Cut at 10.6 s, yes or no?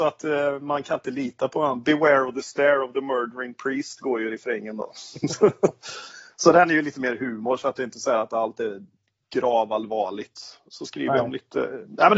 no